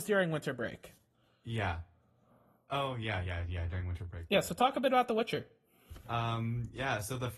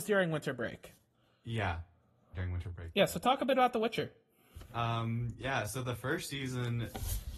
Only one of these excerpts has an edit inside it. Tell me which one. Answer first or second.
second